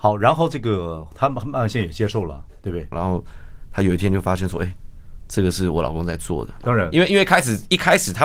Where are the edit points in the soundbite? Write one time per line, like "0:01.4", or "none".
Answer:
0:02.9
0:06.6